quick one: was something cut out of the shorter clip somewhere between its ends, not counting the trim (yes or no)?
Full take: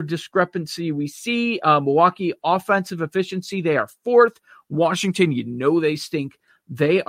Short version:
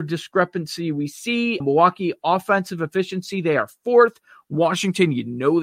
yes